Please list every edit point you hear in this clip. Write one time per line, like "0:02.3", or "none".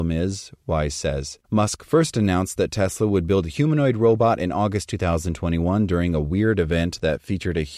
0:01.4